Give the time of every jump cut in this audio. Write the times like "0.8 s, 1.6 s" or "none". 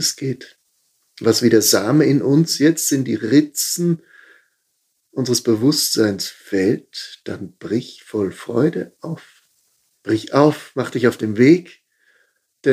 9.9 s